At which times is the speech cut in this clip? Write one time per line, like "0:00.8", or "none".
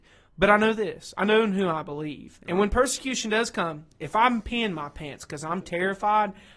0:05.6